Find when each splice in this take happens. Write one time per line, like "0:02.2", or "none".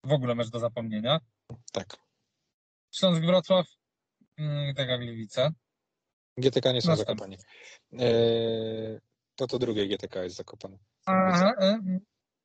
none